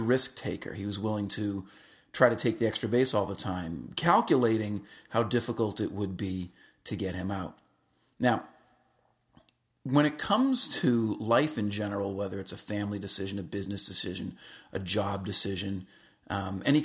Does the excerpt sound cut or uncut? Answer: uncut